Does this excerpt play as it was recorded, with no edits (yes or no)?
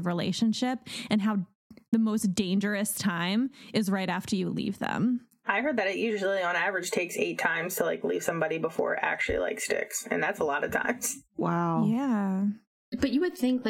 yes